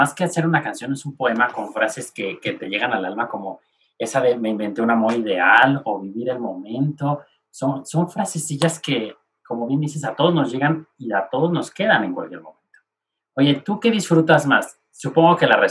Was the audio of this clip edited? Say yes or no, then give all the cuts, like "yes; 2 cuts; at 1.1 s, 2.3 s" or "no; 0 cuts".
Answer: no; 0 cuts